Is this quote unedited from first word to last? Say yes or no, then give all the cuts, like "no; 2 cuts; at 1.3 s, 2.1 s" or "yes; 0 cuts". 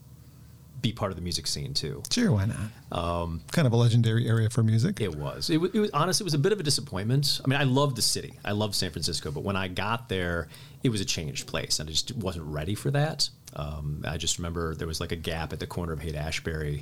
yes; 0 cuts